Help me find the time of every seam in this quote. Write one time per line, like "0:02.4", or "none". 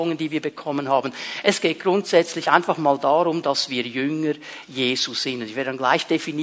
none

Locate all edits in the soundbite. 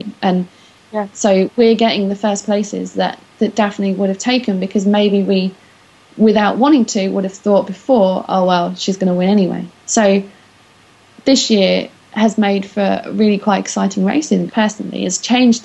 0:09.8
0:14.5

